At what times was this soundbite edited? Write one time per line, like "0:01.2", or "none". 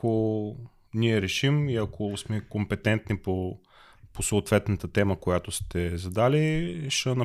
none